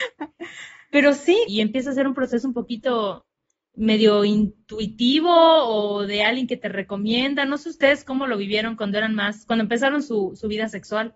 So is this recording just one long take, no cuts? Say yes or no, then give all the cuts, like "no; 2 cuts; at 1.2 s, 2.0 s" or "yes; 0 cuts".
no; 1 cut; at 1.5 s